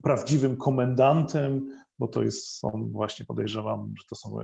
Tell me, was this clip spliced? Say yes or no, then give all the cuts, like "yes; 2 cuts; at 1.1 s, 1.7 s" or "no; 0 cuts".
no; 0 cuts